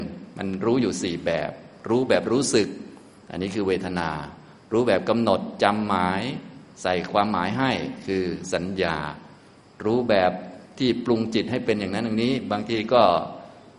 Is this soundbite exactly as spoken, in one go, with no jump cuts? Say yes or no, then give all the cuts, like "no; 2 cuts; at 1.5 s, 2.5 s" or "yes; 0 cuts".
yes; 0 cuts